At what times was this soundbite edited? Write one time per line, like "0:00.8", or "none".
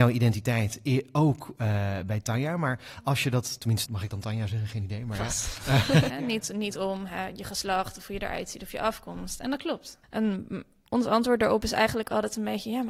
0:03.8
0:06.1
0:10.0